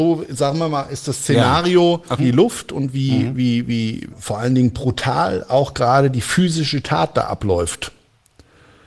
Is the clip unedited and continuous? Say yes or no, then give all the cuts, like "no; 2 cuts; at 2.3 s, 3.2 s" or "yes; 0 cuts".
no; 2 cuts; at 2.2 s, 4.1 s